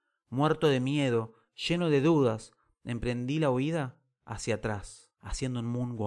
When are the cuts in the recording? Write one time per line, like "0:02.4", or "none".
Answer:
0:05.1